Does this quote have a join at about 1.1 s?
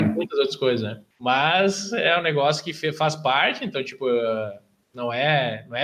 yes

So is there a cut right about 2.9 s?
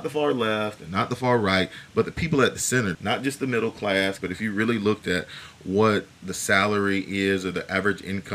yes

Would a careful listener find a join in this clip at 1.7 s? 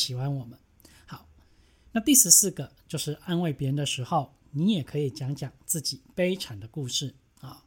no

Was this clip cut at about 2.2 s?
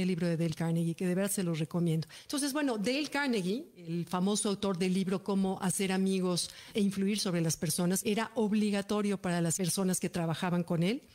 yes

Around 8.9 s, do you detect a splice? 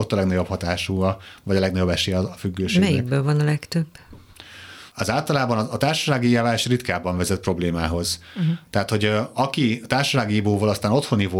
no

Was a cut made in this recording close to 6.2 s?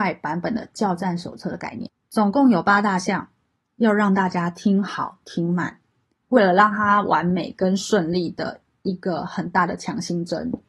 yes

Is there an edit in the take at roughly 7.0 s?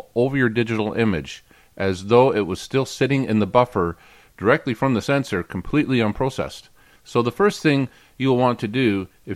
yes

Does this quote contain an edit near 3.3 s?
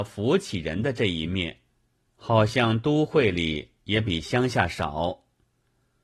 no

